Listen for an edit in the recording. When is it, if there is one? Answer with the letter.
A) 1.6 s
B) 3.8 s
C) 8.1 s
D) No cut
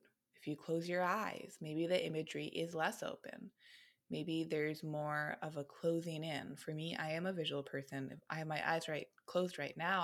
D